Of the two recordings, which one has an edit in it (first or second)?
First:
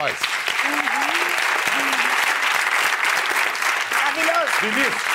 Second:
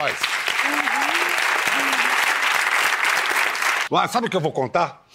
second